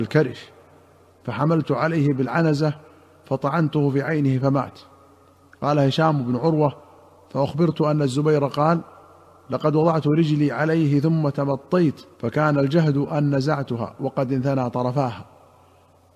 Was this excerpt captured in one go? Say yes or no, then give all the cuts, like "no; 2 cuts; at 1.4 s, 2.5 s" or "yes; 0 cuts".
no; 1 cut; at 12.1 s